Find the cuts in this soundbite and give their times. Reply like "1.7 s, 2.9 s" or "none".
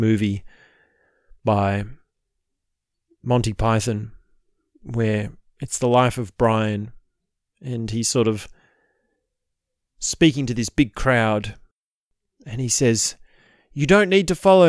none